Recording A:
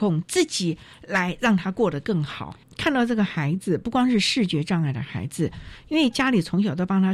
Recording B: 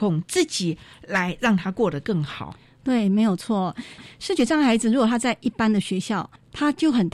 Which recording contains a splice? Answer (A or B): A